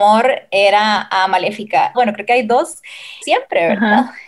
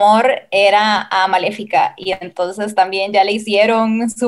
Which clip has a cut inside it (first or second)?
first